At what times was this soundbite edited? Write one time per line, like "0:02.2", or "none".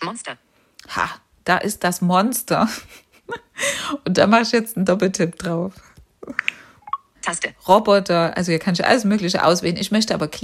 0:07.1